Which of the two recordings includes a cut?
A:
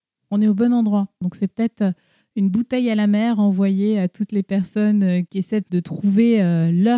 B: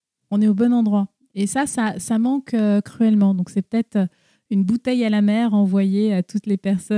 A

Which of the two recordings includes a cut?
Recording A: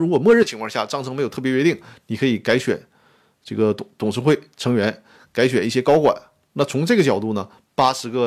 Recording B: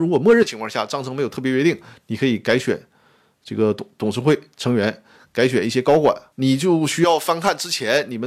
B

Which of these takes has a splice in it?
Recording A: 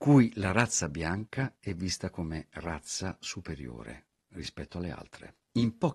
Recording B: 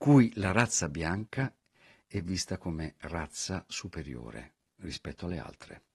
A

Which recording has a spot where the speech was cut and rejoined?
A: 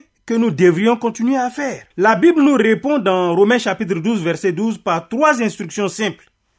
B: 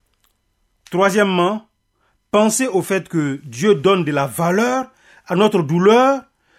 A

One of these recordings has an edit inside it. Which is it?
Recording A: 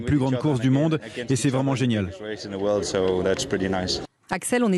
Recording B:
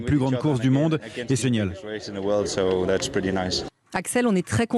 B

